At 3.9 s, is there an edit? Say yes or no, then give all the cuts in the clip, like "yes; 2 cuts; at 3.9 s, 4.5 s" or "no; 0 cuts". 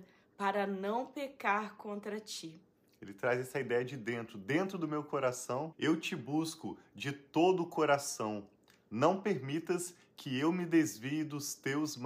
no; 1 cut; at 5.7 s